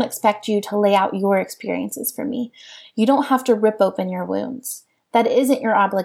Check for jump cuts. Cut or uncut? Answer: uncut